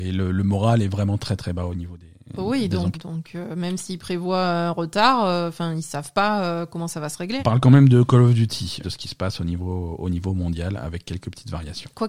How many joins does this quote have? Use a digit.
3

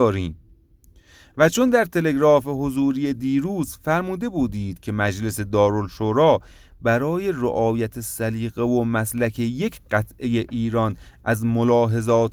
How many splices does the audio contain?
0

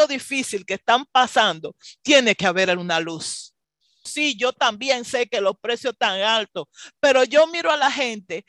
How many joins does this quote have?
1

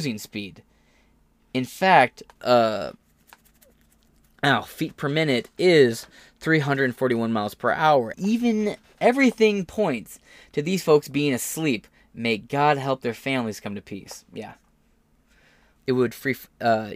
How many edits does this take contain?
3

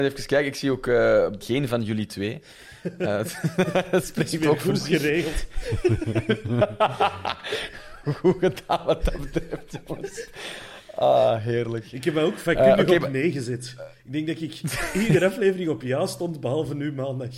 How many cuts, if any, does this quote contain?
1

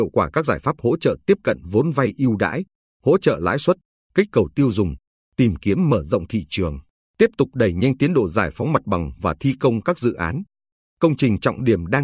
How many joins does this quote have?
1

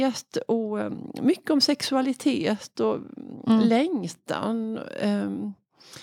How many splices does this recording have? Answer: 0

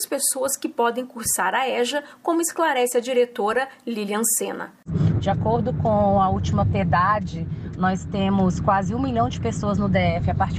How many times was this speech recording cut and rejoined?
1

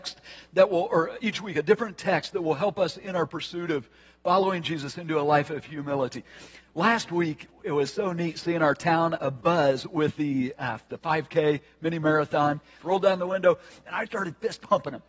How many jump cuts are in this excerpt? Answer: 3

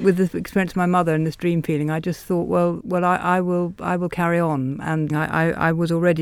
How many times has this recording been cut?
1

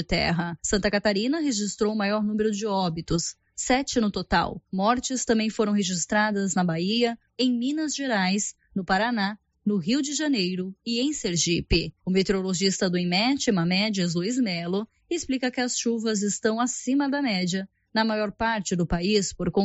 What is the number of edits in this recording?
1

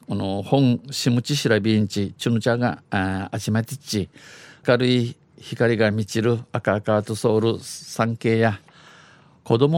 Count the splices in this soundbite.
1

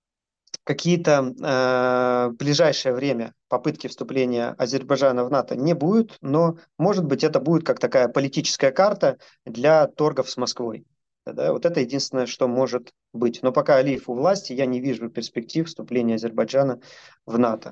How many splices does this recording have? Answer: 1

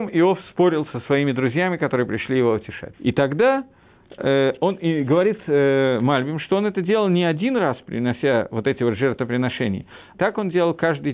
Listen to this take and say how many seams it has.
2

